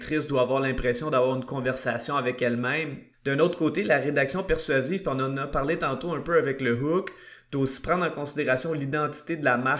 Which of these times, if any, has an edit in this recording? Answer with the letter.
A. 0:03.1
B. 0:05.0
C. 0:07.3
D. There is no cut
A